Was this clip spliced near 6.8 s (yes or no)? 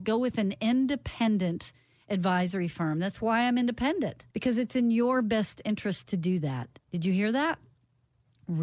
yes